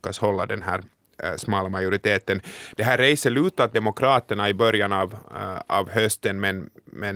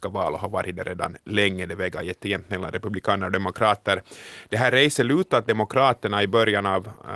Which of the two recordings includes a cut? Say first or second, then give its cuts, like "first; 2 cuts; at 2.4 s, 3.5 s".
first; 1 cut; at 2.7 s